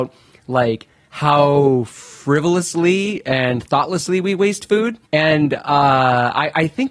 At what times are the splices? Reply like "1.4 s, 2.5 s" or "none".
5.1 s